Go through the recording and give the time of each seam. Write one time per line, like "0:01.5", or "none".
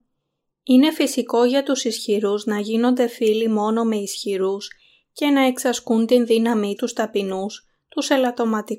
0:06.8